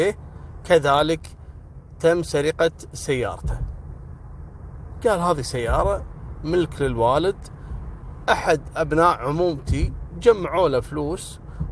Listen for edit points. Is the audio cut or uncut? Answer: cut